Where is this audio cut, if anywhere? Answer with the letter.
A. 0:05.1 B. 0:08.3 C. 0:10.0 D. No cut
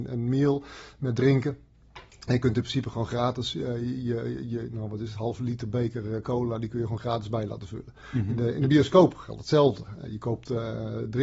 D